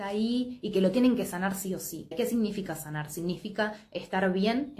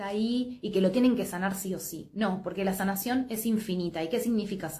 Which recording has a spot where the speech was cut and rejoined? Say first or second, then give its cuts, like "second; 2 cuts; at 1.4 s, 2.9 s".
first; 1 cut; at 2.1 s